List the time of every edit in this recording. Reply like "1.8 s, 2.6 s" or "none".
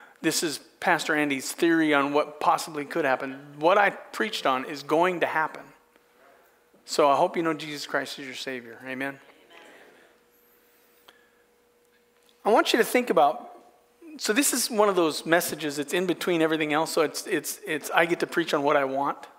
none